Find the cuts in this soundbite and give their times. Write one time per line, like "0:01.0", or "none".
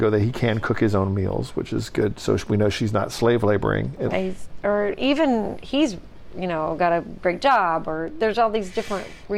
0:04.1